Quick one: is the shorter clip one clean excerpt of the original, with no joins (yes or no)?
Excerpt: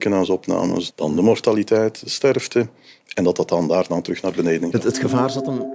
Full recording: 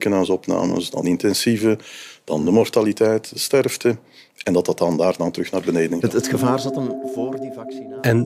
no